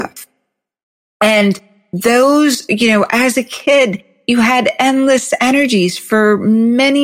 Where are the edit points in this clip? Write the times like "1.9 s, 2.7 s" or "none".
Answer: none